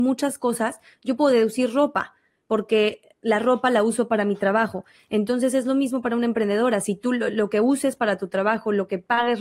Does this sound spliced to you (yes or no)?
no